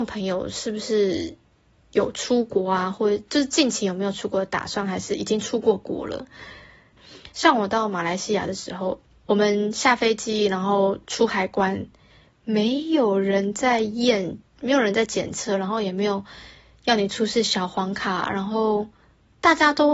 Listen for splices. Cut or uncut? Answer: cut